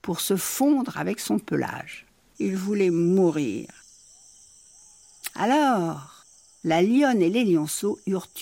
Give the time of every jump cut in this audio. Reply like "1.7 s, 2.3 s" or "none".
2.3 s